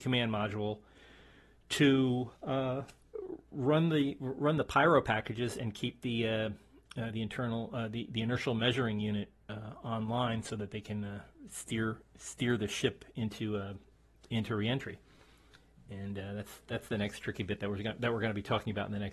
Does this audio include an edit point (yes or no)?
no